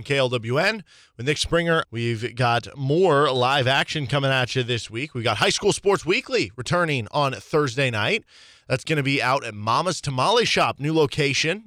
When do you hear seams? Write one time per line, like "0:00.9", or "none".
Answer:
0:01.8